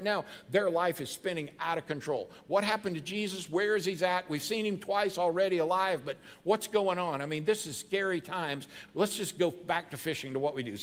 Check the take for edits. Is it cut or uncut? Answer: uncut